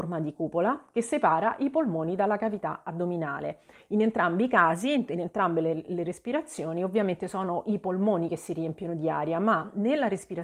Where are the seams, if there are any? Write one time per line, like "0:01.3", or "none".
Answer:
none